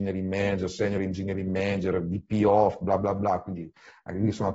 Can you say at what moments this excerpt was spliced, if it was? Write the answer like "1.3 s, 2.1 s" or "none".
none